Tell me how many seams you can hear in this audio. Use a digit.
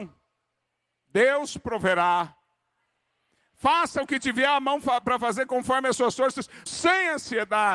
1